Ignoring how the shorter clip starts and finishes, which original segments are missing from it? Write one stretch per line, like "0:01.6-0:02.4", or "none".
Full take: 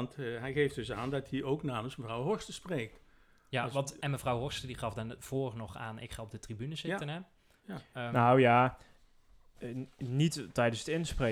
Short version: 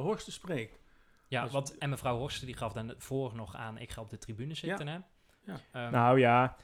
none